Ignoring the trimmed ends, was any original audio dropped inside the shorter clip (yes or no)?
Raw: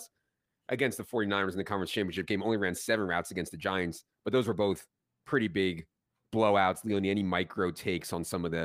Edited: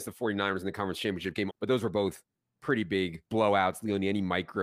yes